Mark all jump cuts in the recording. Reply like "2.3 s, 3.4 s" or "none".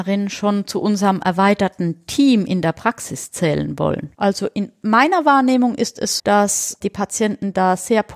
4.1 s, 6.2 s

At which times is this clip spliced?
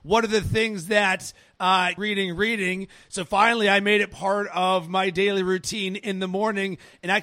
2.0 s

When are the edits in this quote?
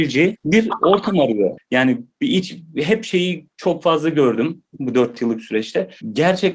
1.6 s

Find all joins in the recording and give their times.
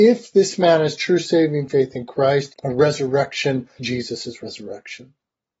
2.5 s, 3.8 s

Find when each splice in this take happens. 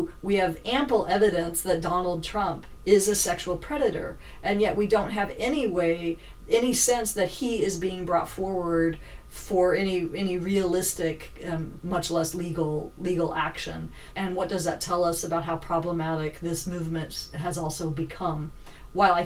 11.8 s, 14.1 s

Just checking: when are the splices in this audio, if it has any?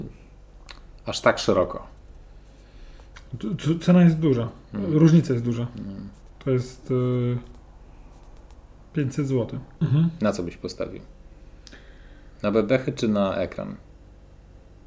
9.8 s

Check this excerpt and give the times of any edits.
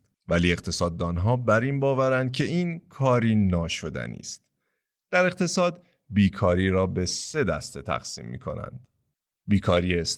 none

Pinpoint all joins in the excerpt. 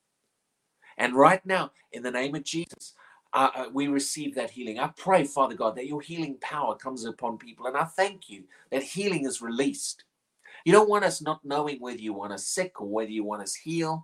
1.8 s, 10.6 s

